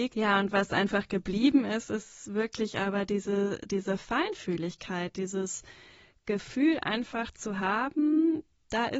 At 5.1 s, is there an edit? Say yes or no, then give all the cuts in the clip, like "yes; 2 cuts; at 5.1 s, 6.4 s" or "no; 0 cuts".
no; 0 cuts